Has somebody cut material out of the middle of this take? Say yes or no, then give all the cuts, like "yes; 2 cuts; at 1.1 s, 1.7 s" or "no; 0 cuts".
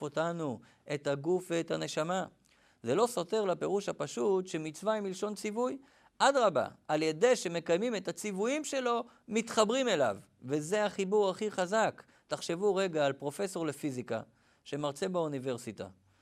no; 0 cuts